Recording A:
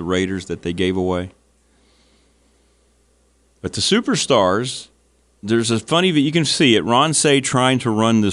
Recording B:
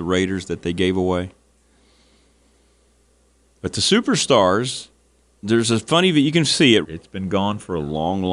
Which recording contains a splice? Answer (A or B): B